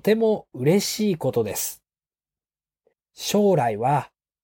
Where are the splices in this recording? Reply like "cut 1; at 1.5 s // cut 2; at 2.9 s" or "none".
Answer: cut 1; at 2.9 s